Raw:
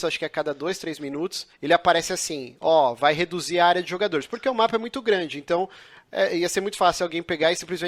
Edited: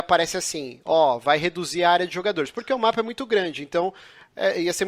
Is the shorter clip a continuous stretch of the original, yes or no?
yes